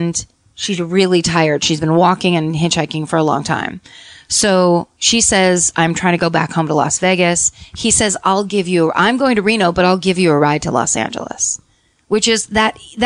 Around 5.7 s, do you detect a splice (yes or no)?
yes